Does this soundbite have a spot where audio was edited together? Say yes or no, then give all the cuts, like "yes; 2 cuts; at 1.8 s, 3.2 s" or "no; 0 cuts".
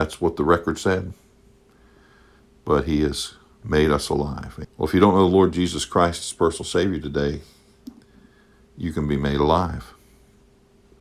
yes; 1 cut; at 4.6 s